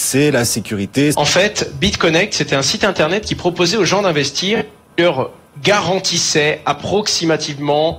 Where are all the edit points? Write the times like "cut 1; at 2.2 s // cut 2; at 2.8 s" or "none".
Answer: cut 1; at 1.1 s